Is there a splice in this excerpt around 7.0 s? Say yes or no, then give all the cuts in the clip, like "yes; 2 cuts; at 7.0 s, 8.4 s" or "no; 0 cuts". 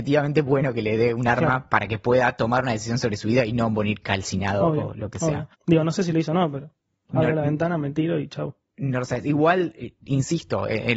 no; 1 cut; at 5.5 s